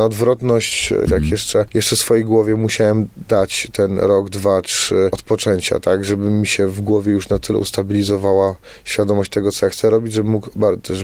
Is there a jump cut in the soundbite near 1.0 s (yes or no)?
yes